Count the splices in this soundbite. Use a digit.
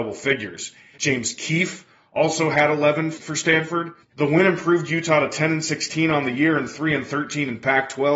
2